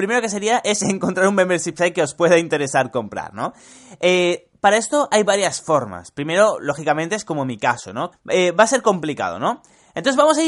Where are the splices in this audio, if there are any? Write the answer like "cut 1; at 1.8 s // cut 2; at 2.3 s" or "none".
cut 1; at 8.1 s